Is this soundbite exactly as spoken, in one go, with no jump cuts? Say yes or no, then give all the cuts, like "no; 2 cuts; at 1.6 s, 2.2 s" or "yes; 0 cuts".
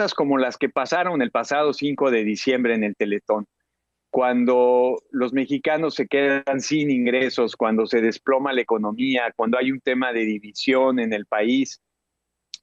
yes; 0 cuts